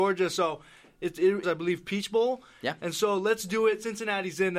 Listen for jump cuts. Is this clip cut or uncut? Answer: cut